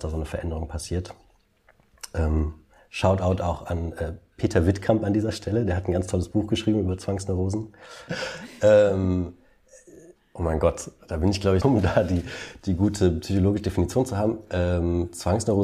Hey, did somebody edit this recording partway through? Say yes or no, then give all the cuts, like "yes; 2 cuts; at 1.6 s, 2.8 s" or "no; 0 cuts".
yes; 2 cuts; at 8.1 s, 11.6 s